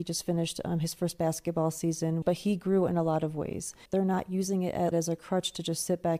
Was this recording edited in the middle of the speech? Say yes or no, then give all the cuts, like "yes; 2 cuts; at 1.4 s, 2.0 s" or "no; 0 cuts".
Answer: yes; 3 cuts; at 2.2 s, 3.9 s, 4.9 s